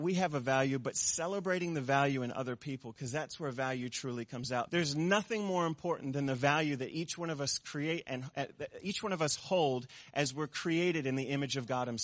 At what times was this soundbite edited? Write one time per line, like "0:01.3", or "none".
0:04.7

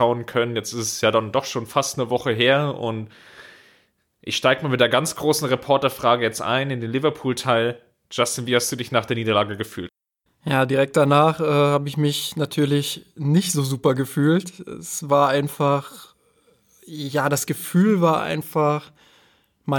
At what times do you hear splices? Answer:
none

